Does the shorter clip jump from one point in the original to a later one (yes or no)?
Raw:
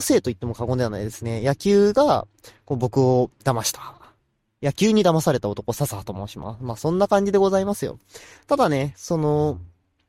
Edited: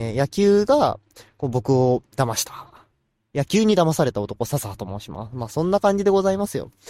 no